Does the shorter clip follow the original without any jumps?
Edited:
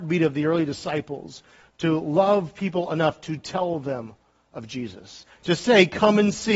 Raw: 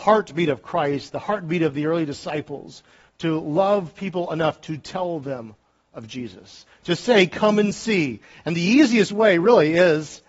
yes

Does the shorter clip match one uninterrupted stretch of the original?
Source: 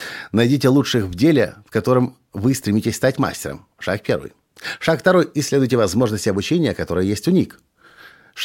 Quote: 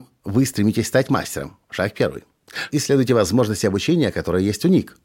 no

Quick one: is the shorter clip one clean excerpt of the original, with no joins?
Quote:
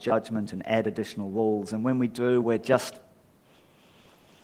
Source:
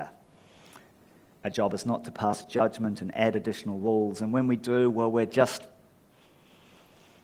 no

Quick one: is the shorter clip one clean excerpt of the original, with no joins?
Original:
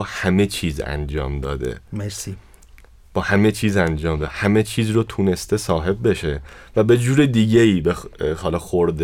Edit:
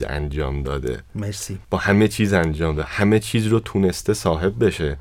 no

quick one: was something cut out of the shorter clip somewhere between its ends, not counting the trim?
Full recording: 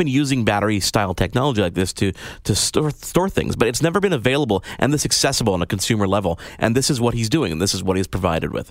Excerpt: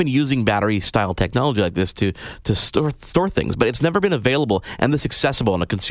no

